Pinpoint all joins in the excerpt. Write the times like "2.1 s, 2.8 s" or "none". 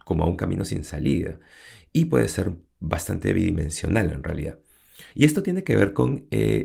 5.1 s